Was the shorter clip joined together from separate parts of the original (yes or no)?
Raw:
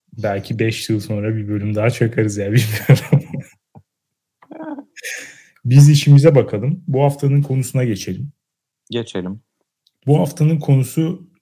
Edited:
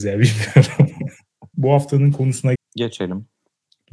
yes